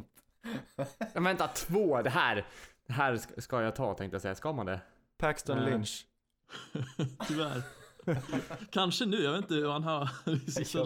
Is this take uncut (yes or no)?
yes